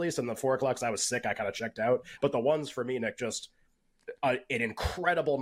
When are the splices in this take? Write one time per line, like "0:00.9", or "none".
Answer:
none